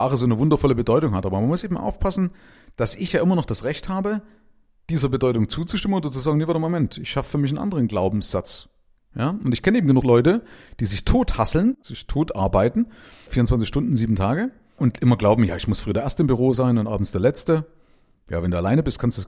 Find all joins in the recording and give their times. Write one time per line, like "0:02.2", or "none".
none